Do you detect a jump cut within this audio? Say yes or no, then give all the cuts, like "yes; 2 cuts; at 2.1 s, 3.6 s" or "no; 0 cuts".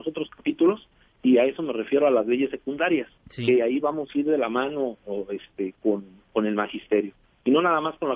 no; 0 cuts